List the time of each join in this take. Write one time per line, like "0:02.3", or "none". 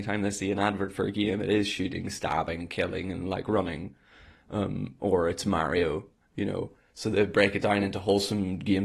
none